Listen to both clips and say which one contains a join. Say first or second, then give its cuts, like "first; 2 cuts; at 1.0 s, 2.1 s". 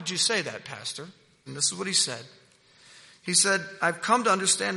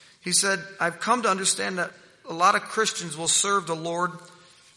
first; 1 cut; at 1.5 s